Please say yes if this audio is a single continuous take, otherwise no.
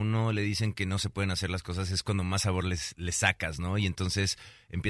yes